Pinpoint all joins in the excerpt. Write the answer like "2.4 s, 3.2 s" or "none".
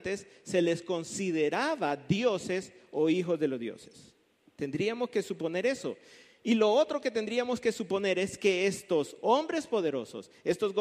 none